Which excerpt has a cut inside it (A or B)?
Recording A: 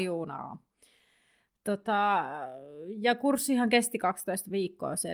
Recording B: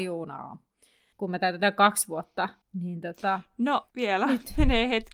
B